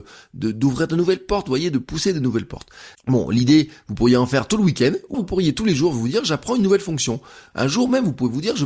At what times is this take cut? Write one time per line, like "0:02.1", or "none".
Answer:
0:02.9
0:05.1
0:07.5

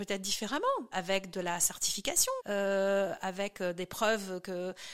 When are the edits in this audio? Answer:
0:00.9
0:02.4

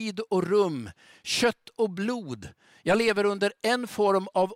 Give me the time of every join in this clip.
none

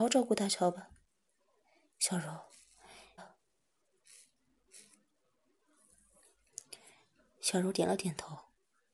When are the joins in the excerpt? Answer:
0:03.2

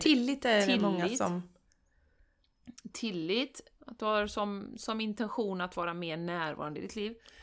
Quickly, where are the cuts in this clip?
0:03.8

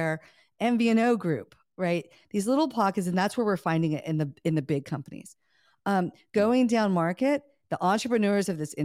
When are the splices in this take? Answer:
none

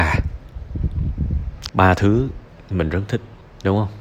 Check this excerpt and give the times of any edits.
0:01.7

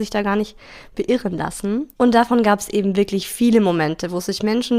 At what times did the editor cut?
0:01.9

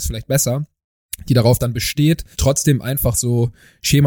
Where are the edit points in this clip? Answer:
0:02.3

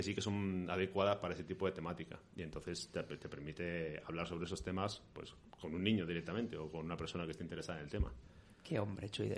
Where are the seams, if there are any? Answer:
none

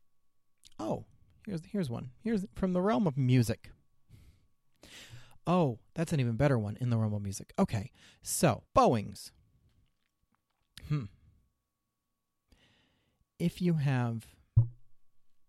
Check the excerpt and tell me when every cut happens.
0:08.7
0:10.8

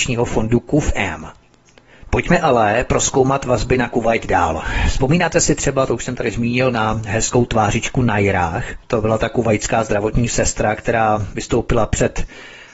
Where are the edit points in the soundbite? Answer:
0:02.1

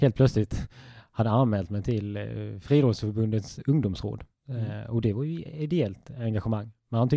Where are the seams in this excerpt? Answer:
none

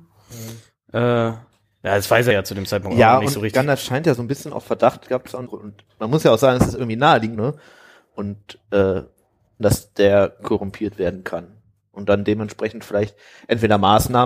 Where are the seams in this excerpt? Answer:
0:05.5
0:07.4
0:09.6

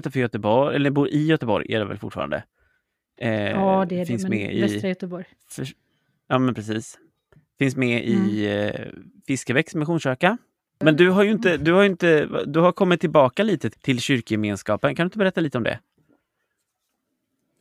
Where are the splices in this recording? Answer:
0:13.7

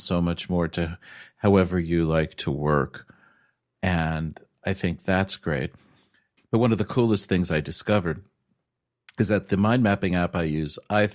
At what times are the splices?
0:06.4

